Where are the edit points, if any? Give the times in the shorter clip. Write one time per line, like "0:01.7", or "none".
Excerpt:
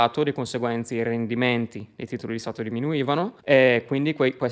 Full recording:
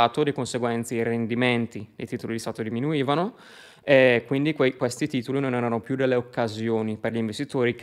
0:03.4

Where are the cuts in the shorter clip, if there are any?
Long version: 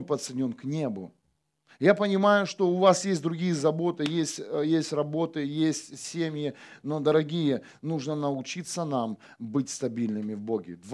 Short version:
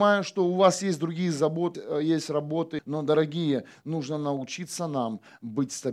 0:01.7
0:02.8

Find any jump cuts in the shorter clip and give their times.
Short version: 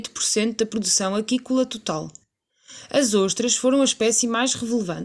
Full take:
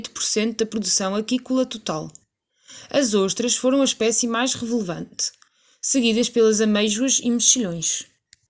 none

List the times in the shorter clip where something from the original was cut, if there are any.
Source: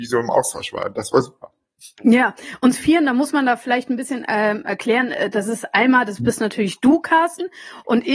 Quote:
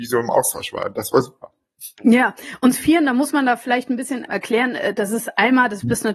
0:04.3

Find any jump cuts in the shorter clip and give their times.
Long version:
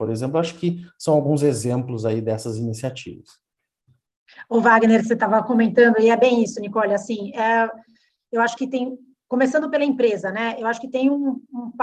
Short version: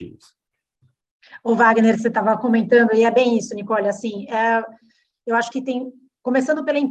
none

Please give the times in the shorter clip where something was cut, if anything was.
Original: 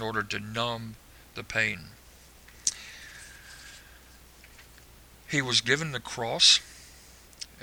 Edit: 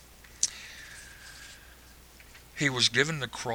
0:02.5

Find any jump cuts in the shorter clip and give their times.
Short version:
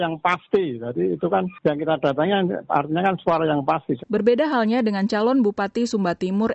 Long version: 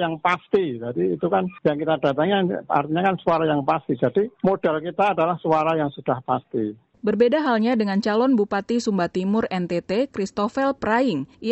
0:04.0

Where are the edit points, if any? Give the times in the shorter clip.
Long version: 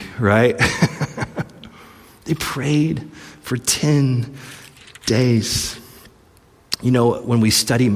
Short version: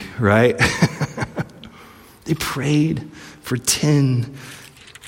none

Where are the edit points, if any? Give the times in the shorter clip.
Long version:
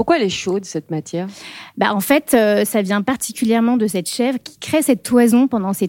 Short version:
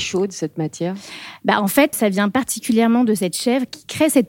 0:01.9

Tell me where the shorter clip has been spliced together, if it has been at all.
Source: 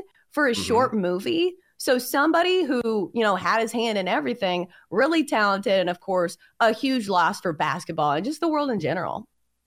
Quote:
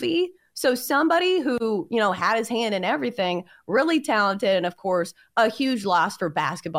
none

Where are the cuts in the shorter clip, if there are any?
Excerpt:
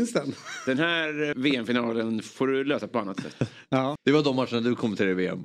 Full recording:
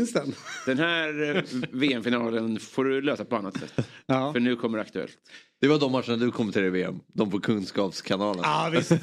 0:01.3
0:04.0

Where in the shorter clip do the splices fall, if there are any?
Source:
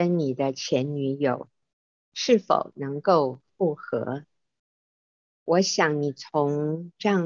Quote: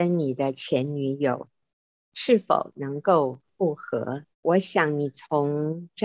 0:04.3

